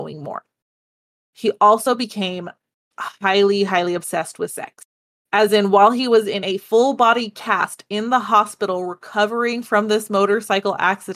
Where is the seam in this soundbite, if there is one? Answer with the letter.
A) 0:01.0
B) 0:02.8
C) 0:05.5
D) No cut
D